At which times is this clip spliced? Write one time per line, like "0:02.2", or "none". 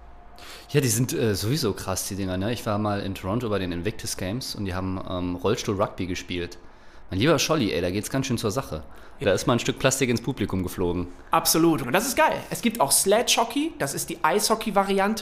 0:09.2
0:11.8